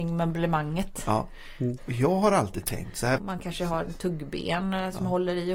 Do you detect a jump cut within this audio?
yes; 2 cuts; at 1.8 s, 3.2 s

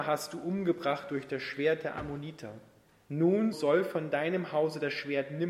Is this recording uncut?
no; 1 cut; at 3.5 s

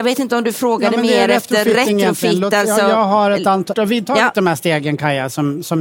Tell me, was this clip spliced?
yes; 1 cut; at 3.7 s

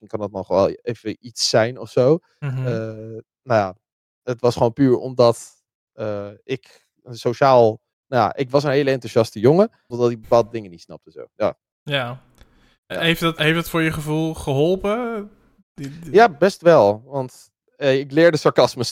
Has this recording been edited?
yes; 2 cuts; at 9.9 s, 13.4 s

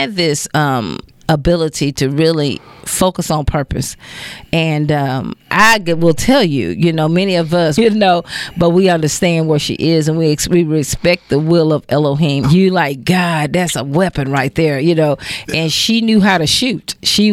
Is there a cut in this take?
yes; 2 cuts; at 7.8 s, 12.4 s

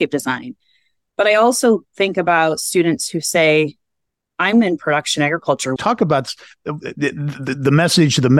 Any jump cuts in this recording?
yes; 1 cut; at 5.8 s

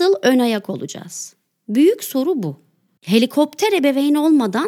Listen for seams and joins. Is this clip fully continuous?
no; 1 cut; at 3.0 s

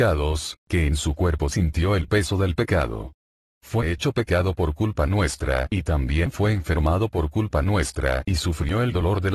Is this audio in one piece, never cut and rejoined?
yes; 0 cuts

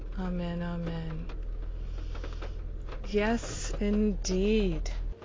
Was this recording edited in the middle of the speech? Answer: no; 0 cuts

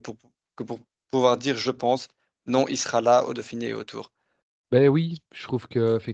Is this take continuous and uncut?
yes; 0 cuts

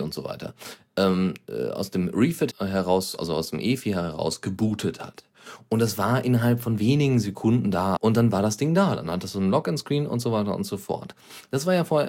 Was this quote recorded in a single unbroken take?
no; 2 cuts; at 2.5 s, 8.0 s

